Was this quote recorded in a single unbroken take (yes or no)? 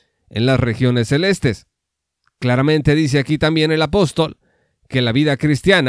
yes